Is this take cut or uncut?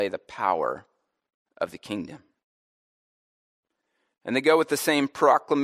uncut